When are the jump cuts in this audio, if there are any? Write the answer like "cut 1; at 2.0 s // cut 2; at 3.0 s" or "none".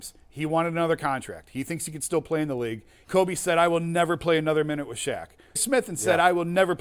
cut 1; at 3.0 s // cut 2; at 5.6 s